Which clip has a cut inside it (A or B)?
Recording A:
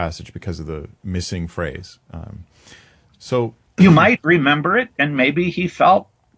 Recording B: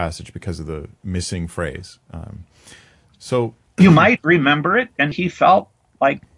B